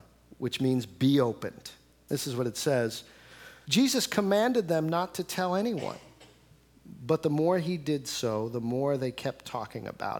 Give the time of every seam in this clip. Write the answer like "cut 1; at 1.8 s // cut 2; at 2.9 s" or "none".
cut 1; at 2.1 s // cut 2; at 3.6 s